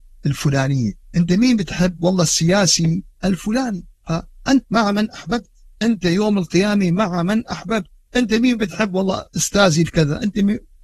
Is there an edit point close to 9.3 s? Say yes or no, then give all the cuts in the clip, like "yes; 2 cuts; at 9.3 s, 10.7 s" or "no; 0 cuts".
yes; 2 cuts; at 4.6 s, 9.3 s